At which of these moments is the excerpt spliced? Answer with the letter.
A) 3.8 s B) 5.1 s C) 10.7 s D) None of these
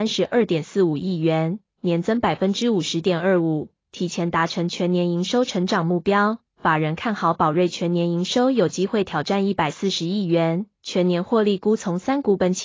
C